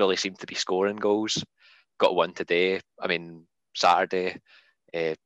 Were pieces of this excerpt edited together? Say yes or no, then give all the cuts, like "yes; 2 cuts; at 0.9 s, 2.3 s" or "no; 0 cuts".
yes; 1 cut; at 3.6 s